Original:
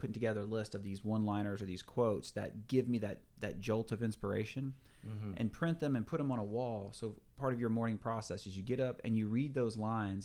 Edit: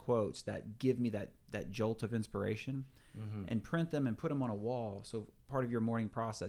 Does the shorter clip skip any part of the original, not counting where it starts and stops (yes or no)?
no